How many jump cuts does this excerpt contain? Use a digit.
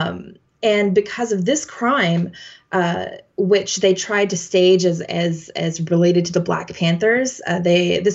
0